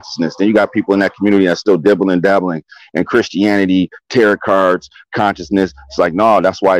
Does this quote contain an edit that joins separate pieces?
no; 0 cuts

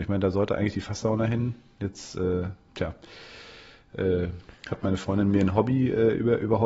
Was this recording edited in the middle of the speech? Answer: no; 0 cuts

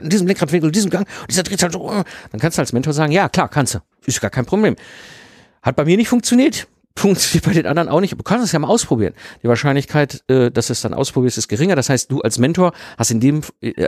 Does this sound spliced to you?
no; 0 cuts

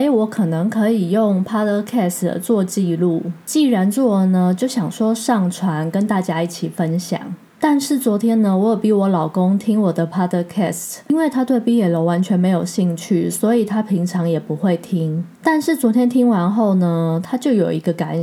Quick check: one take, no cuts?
yes; 0 cuts

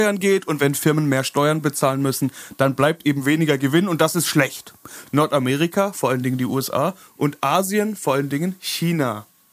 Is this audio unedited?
no; 1 cut; at 5.1 s

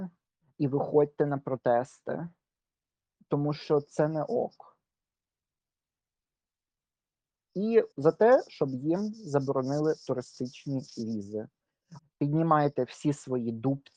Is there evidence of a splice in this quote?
yes; 2 cuts; at 7.9 s, 12.0 s

